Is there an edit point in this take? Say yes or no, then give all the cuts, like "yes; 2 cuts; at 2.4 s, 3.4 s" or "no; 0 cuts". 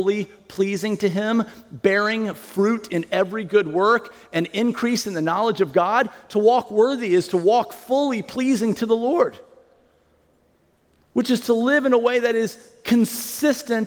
no; 0 cuts